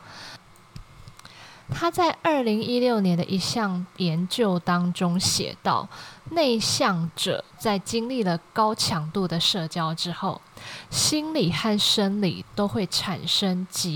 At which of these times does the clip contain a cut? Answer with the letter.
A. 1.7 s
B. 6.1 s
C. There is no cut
A